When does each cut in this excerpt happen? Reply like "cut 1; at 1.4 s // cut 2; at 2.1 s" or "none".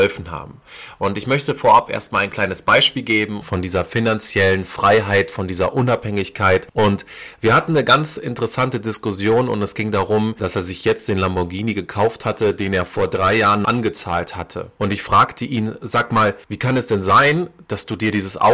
cut 1; at 3.4 s